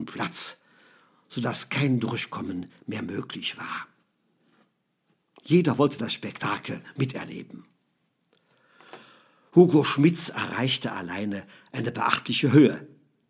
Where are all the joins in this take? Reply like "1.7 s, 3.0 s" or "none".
none